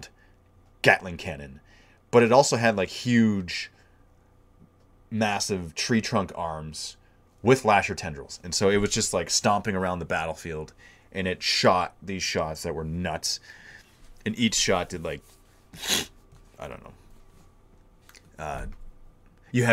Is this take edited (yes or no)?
no